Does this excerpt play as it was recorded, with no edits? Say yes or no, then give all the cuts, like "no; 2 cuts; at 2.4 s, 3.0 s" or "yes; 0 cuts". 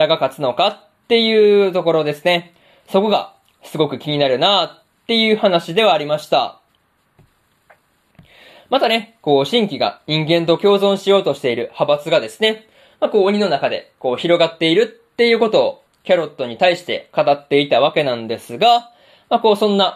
yes; 0 cuts